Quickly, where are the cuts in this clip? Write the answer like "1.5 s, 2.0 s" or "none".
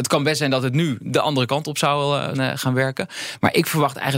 2.3 s